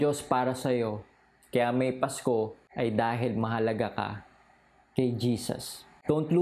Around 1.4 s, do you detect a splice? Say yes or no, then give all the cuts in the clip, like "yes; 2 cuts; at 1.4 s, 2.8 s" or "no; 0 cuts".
no; 0 cuts